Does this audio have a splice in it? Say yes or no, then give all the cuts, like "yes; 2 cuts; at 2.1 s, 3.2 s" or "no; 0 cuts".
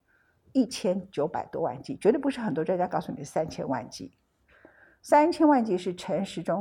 no; 0 cuts